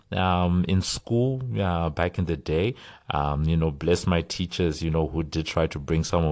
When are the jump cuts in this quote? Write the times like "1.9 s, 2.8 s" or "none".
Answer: none